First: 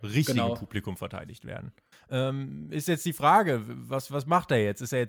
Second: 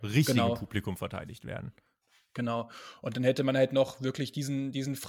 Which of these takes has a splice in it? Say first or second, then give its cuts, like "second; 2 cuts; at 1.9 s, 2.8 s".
first; 1 cut; at 1.9 s